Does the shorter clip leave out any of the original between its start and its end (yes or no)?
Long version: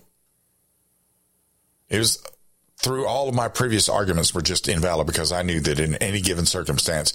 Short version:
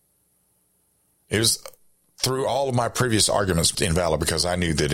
yes